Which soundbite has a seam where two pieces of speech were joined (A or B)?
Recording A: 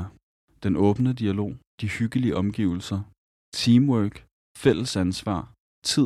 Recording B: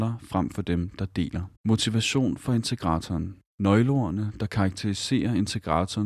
B